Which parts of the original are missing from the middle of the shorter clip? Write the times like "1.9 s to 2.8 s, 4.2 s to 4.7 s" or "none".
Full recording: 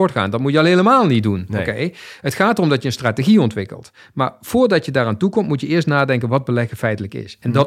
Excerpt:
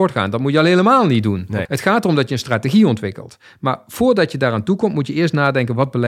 1.7 s to 2.2 s